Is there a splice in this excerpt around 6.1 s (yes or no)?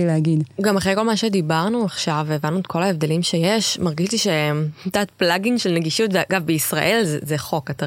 no